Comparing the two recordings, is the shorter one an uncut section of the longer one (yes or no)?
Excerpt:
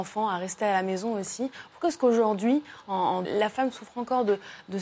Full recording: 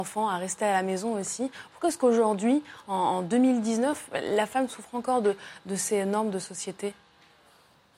no